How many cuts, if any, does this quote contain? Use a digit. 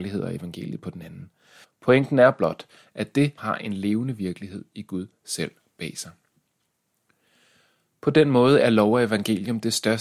2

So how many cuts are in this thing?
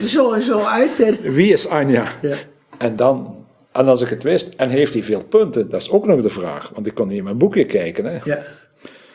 0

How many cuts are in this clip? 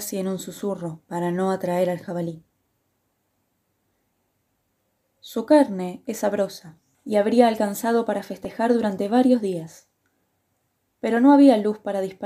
0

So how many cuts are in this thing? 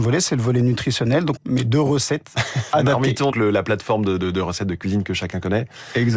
2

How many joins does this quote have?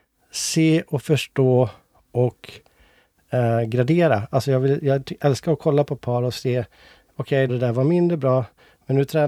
1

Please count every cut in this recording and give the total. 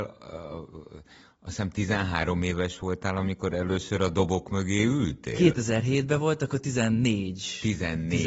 0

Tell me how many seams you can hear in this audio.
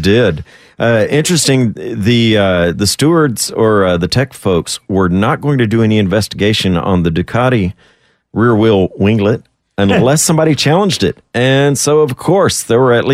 0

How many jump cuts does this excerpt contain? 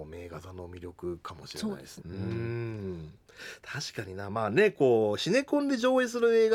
1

